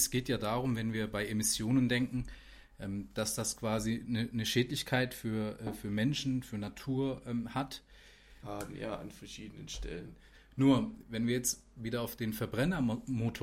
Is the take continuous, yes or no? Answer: no